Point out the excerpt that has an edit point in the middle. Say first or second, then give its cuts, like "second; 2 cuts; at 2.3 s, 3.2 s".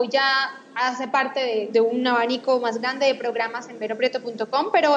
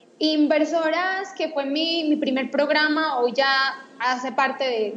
first; 1 cut; at 1.7 s